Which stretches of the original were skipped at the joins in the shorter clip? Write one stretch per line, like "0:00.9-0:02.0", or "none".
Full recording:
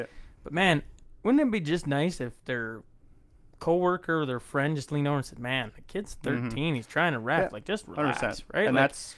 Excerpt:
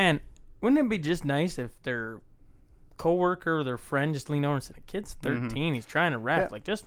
0:05.3-0:05.7